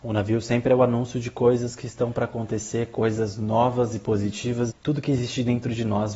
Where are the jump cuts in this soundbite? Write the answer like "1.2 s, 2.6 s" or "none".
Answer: 4.7 s